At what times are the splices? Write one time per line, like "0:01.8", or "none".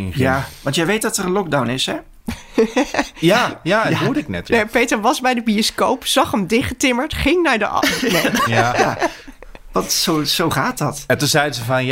0:08.5

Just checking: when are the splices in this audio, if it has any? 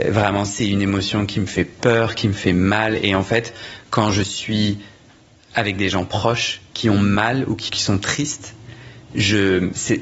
0:07.7

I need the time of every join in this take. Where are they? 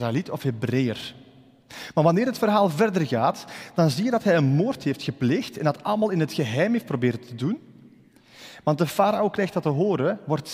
0:08.6

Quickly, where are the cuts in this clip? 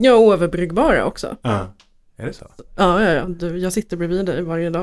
0:02.1

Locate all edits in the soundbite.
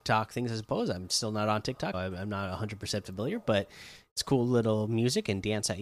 0:01.9

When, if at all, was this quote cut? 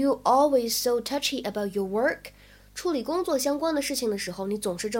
none

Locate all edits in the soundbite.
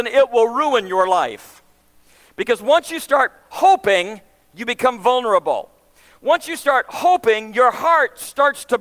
none

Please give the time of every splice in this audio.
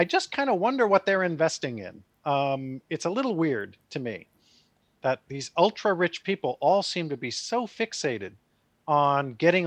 none

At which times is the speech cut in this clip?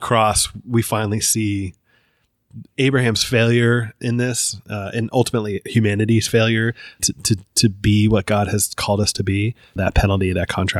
0:07.0
0:09.8

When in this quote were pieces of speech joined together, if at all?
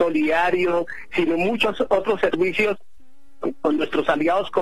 0:01.1

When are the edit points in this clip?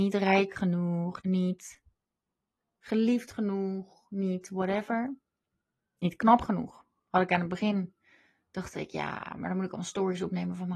0:01.2

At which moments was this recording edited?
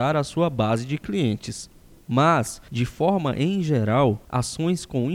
0:02.0

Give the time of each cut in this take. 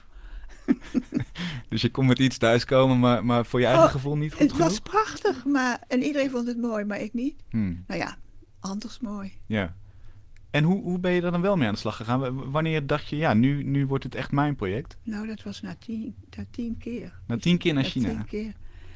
none

